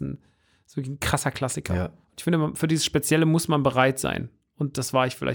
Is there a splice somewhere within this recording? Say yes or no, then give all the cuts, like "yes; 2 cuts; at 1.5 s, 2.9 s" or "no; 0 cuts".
yes; 1 cut; at 2.0 s